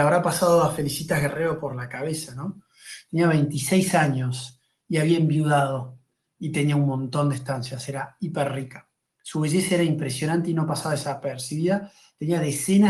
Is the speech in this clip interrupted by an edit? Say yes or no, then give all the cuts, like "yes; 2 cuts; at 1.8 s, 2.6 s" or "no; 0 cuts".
no; 0 cuts